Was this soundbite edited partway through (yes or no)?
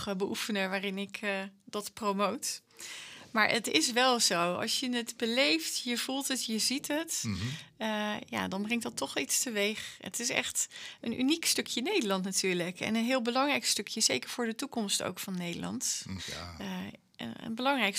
yes